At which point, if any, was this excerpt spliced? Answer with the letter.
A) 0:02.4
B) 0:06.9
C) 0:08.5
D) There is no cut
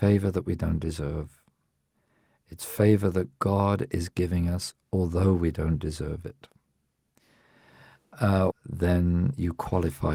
C